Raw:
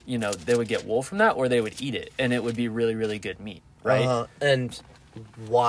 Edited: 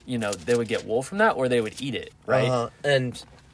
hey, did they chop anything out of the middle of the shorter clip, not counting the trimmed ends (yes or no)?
yes